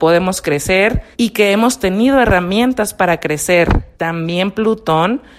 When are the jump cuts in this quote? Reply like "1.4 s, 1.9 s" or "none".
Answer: 1.1 s, 3.9 s